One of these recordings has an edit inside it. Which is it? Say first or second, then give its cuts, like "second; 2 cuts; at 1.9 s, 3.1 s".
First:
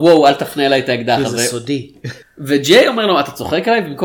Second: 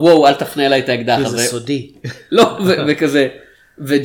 first; 1 cut; at 2.2 s